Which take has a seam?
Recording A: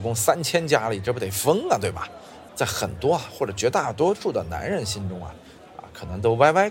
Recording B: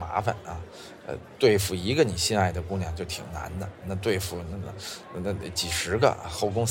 A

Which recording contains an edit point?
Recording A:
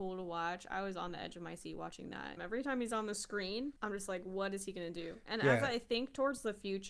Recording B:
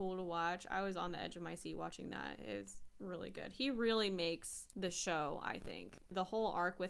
A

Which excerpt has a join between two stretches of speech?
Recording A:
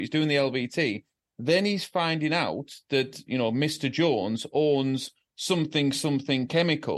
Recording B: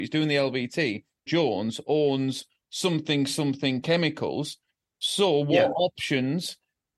B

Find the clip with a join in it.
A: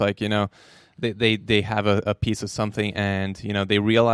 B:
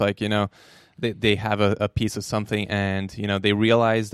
B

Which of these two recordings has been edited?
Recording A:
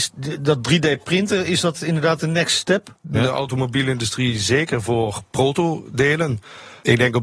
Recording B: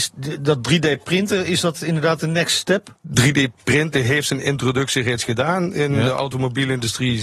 A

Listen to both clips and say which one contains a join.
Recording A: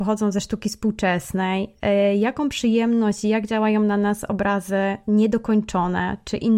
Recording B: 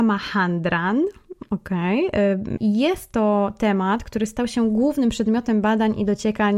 B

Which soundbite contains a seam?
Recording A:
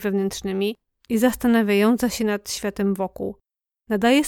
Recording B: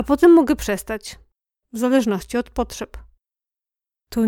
B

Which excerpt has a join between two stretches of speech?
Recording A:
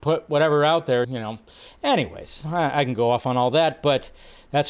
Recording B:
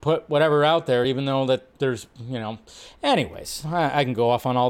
A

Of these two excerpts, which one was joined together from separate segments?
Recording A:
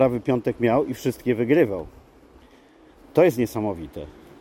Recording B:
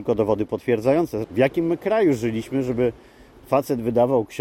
B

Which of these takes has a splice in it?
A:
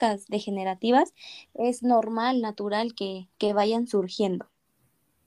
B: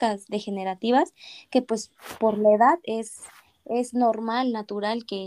A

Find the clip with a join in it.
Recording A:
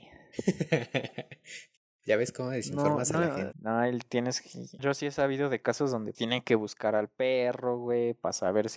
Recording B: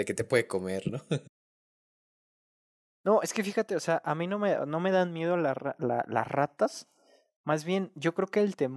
A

